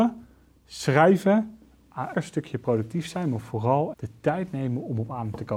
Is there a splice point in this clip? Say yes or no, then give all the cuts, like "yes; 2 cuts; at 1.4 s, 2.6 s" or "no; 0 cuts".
yes; 2 cuts; at 2.1 s, 3.9 s